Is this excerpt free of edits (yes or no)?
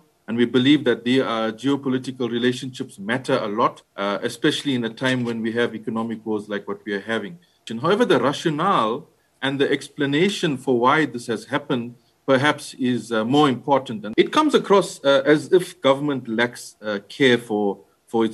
yes